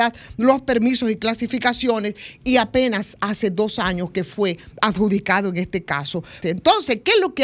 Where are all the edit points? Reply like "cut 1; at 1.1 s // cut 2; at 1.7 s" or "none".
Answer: cut 1; at 6.4 s